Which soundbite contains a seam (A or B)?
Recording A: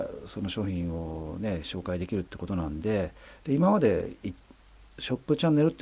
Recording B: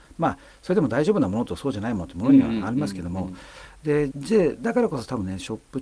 B